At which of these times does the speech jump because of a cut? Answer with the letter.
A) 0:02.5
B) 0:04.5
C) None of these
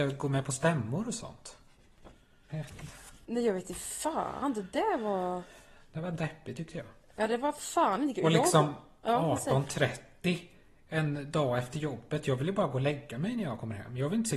A